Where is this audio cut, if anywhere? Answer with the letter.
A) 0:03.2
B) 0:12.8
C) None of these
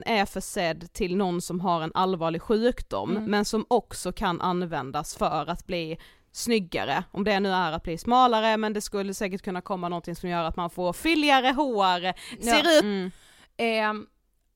B